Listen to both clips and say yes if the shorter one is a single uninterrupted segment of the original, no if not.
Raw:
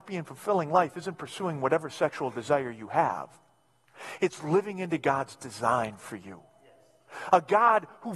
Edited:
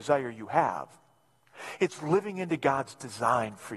yes